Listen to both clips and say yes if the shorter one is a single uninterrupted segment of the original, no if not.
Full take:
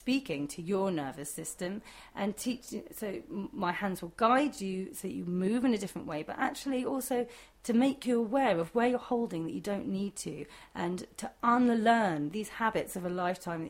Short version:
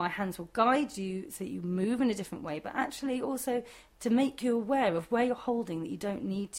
yes